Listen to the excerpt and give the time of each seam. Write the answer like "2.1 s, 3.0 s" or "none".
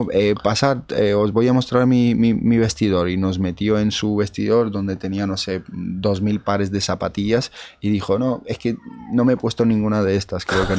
none